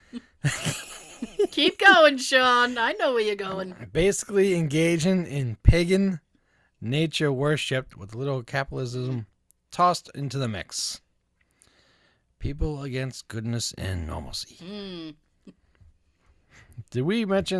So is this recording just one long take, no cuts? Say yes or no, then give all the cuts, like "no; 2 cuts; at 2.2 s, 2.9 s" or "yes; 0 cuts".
yes; 0 cuts